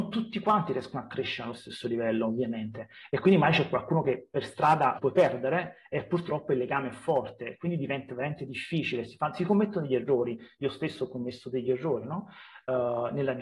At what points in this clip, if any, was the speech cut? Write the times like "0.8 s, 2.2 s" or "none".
5.0 s